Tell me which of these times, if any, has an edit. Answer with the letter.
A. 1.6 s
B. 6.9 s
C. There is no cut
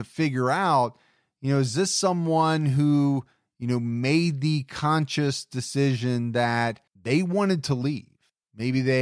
B